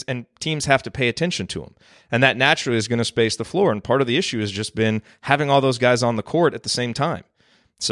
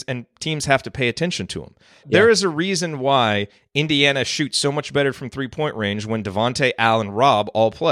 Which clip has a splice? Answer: second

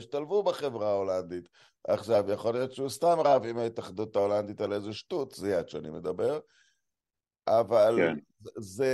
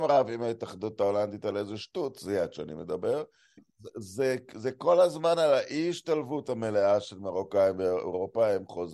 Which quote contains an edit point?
second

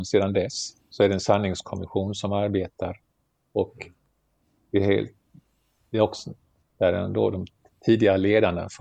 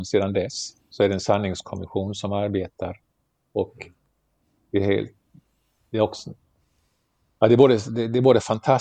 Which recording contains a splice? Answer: first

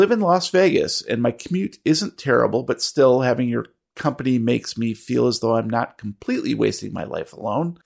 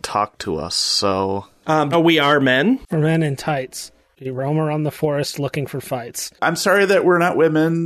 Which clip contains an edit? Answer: second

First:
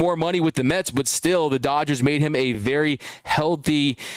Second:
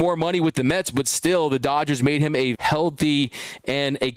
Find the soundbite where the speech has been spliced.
second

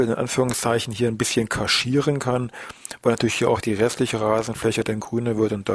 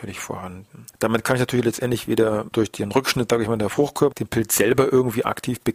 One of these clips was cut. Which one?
second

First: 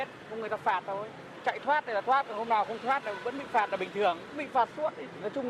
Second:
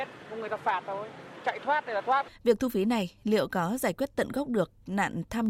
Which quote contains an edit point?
second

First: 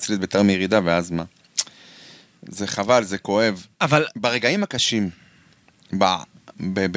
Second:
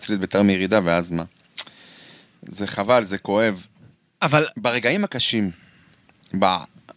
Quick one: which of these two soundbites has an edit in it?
first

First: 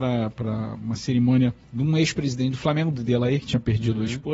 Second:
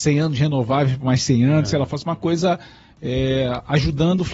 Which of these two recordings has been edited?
first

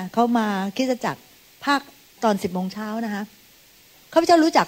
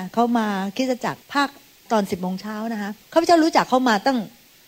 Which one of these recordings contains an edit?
second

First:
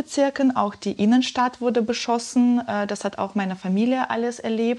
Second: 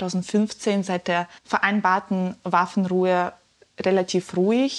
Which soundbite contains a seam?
second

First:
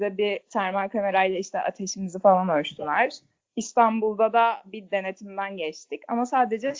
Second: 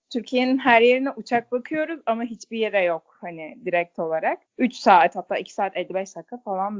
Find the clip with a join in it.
second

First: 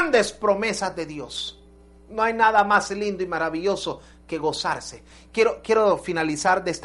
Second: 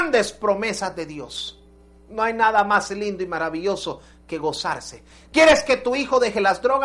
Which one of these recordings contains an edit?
second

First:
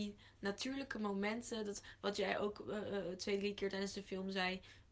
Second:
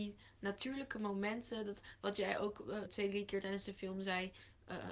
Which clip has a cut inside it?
second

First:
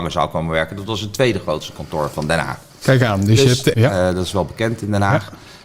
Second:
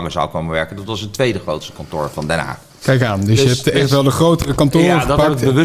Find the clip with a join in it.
first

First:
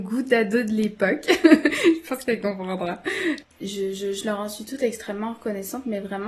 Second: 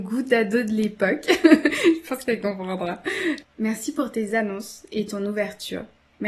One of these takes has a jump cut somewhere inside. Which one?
first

